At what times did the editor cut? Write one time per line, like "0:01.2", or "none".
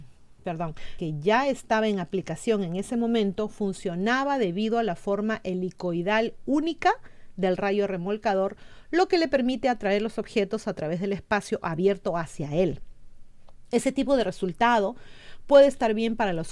0:01.0
0:13.7